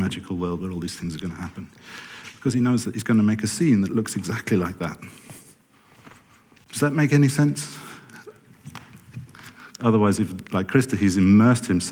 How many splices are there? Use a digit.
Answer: 1